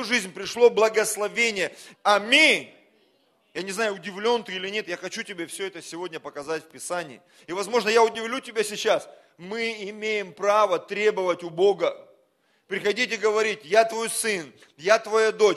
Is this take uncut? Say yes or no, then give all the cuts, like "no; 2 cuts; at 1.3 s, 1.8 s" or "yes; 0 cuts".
no; 2 cuts; at 1.9 s, 7.4 s